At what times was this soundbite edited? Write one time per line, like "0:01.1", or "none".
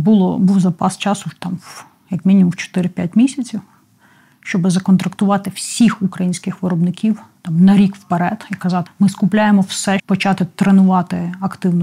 0:08.9
0:10.0